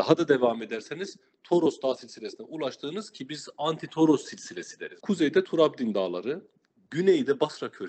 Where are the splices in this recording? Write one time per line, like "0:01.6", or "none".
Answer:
0:05.0